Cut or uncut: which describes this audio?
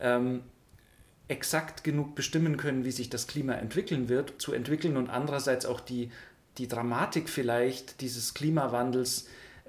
cut